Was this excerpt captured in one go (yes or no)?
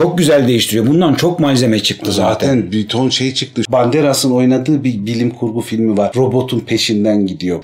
yes